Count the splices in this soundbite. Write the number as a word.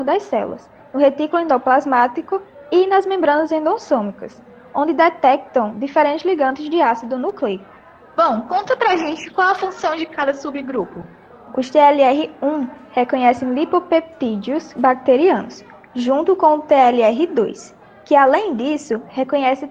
zero